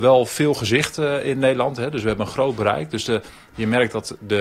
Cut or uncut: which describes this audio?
uncut